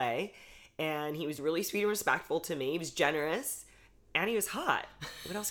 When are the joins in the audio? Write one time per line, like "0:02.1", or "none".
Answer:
none